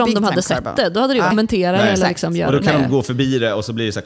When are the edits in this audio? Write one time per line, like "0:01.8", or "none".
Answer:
0:01.3